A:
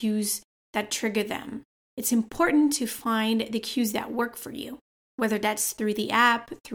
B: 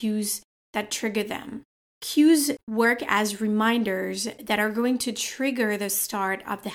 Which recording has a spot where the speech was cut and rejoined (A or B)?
A